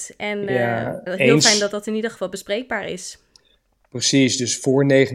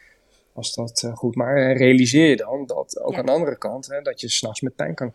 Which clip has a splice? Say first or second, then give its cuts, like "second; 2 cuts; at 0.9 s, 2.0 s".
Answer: first; 1 cut; at 1.1 s